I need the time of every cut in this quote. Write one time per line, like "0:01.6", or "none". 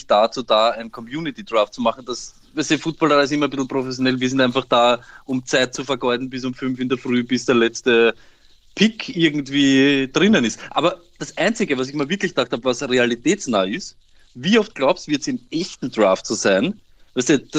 none